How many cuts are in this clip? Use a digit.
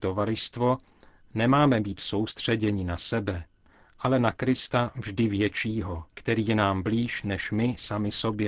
1